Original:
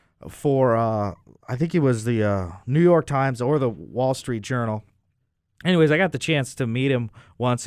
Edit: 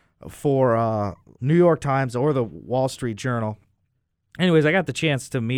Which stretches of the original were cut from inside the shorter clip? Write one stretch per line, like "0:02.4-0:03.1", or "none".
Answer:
0:01.4-0:02.6